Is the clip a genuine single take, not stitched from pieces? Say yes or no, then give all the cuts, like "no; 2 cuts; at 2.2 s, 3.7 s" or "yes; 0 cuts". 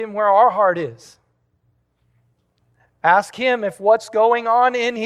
yes; 0 cuts